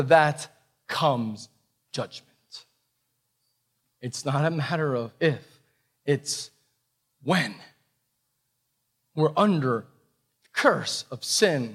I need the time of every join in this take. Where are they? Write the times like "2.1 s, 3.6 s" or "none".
3.9 s